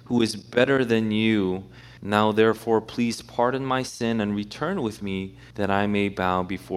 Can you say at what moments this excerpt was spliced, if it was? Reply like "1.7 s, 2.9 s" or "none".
2.0 s, 5.5 s